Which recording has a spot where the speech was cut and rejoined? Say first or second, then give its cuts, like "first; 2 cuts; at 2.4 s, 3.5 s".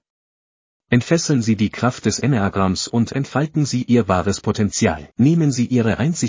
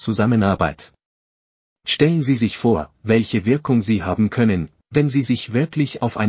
first; 1 cut; at 5.1 s